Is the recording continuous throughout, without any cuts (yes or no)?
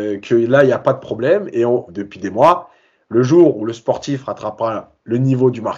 no